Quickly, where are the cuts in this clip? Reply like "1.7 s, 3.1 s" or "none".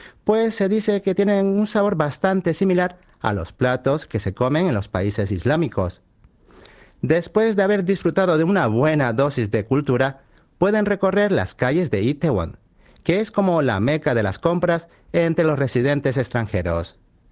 none

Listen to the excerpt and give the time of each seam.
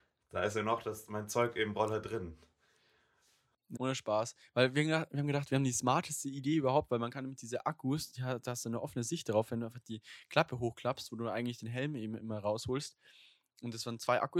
3.7 s

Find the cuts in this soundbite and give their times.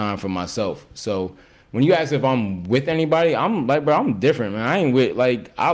none

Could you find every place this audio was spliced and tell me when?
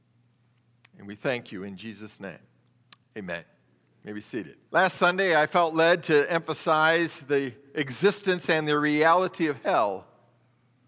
4.6 s

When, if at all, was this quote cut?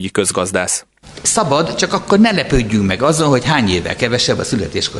1.1 s

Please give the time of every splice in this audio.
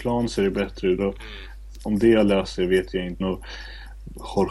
1.0 s, 3.2 s

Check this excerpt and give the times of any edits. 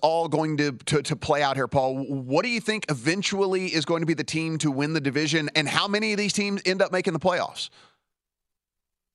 none

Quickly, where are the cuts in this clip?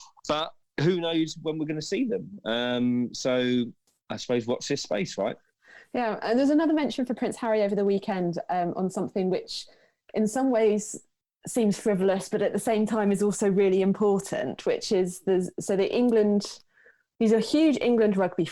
none

